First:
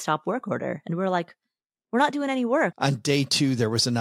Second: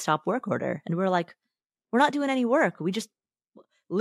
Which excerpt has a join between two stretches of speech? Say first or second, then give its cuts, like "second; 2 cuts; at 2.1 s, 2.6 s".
first; 1 cut; at 2.7 s